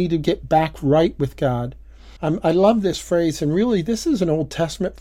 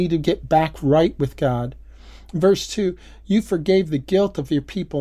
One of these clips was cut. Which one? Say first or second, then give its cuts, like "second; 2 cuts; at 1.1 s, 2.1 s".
first; 1 cut; at 2.2 s